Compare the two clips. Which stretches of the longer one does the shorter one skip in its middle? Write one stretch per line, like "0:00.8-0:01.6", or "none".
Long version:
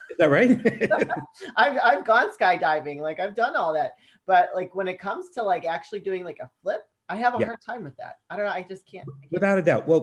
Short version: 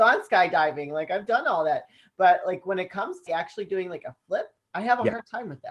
0:05.4-0:05.6